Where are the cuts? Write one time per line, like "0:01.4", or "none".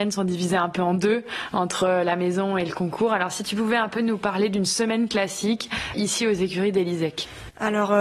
0:05.9